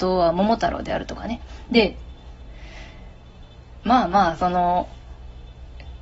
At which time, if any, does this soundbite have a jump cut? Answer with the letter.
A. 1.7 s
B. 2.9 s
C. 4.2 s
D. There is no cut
A